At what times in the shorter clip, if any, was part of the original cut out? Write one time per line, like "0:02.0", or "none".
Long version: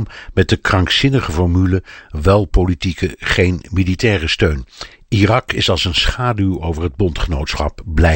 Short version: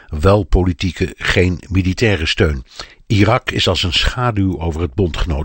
none